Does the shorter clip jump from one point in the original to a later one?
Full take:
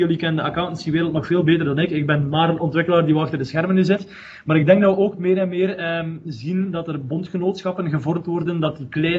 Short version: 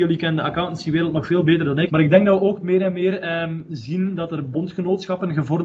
yes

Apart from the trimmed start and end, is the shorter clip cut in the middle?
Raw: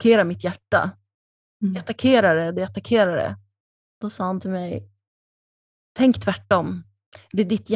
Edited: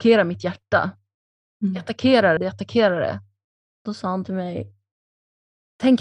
yes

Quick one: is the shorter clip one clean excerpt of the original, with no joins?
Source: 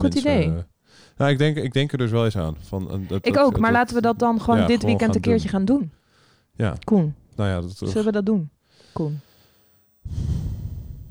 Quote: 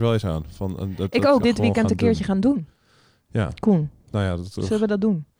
no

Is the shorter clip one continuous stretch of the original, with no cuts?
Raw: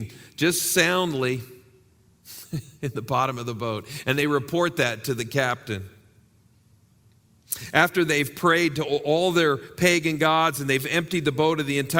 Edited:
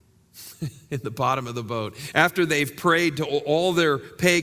no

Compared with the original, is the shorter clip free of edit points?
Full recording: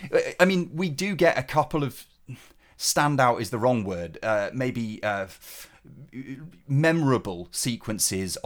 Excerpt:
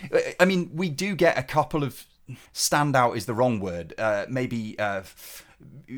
no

